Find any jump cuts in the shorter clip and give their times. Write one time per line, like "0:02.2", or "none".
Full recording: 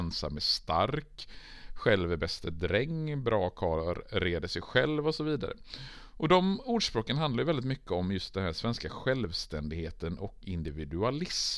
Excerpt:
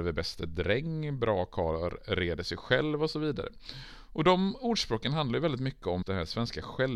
0:06.0

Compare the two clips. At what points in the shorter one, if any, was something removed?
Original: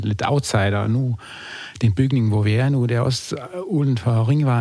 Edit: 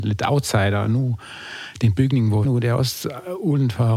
0:02.4

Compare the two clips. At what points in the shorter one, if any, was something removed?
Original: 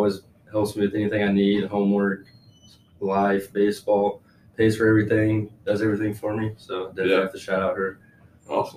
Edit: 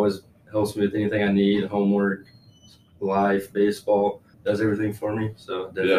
0:04.3

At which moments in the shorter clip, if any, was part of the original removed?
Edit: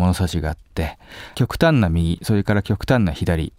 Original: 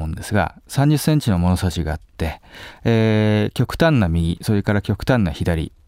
0:01.3

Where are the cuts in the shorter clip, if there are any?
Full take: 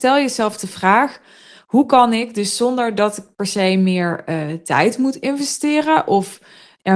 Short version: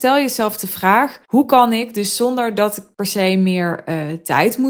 0:01.2

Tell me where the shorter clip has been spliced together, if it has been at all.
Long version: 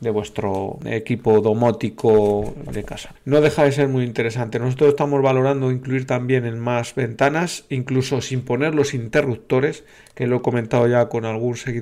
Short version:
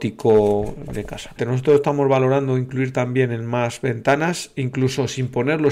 0:01.4

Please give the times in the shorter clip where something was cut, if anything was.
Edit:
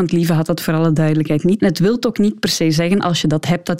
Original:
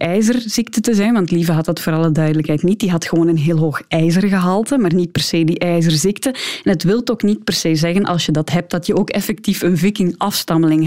0:01.6

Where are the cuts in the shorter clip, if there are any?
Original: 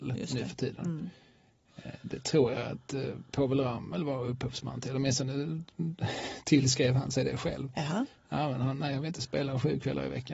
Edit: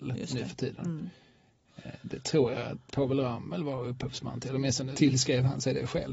0:02.9
0:04.9

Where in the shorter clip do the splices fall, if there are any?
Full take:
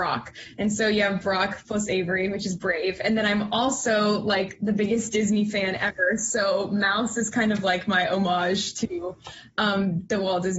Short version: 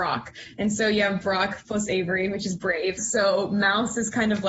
0:03.0

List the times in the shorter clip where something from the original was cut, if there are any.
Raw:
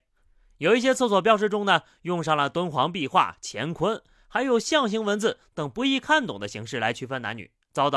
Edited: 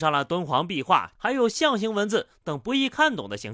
0:01.2

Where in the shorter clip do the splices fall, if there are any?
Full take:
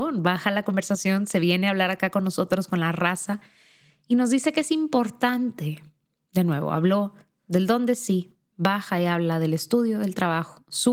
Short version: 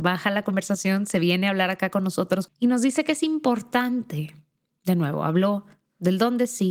0:02.5

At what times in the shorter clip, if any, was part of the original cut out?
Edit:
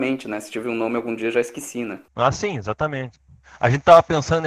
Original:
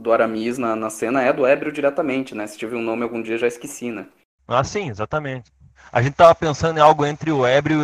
0:02.1

